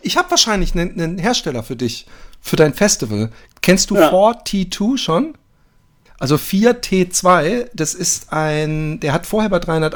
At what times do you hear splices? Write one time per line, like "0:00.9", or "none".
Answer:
0:06.1